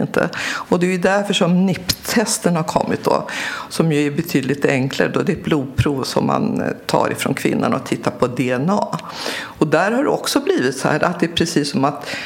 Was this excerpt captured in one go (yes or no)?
yes